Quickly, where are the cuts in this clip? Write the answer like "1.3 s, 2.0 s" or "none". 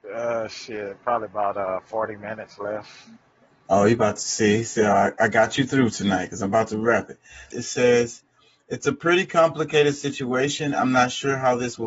7.5 s